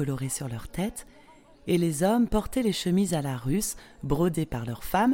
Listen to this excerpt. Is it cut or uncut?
uncut